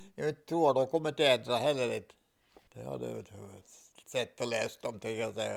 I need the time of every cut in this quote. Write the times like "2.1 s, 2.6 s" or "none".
2.7 s